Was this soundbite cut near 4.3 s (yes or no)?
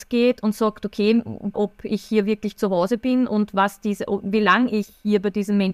no